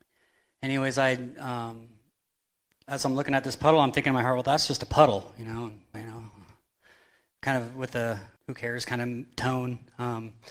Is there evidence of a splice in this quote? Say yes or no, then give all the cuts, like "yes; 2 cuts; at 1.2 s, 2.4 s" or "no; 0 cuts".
yes; 2 cuts; at 5.9 s, 8.4 s